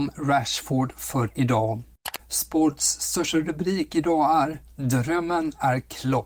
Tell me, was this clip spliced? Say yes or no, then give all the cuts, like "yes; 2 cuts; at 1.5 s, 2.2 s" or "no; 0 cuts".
yes; 1 cut; at 2.2 s